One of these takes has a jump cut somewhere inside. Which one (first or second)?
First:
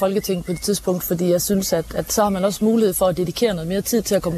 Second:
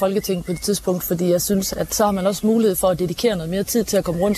second